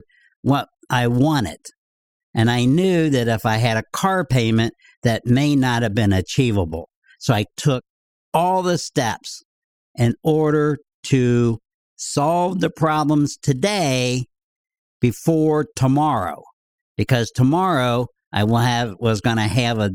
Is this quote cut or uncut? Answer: uncut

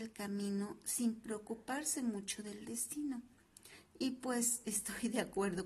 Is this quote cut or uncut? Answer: uncut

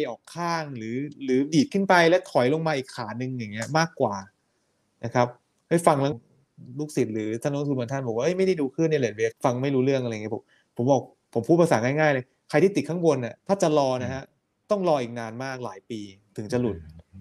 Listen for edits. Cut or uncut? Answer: cut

